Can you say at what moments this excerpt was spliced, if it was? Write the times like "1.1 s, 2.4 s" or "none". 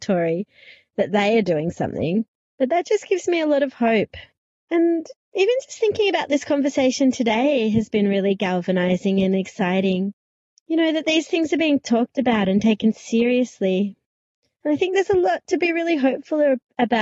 none